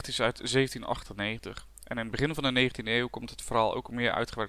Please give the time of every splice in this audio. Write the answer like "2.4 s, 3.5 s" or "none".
none